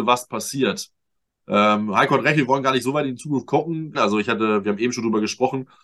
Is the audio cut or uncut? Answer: cut